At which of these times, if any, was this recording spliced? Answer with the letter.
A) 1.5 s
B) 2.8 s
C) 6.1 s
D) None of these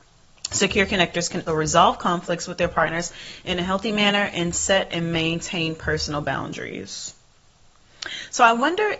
A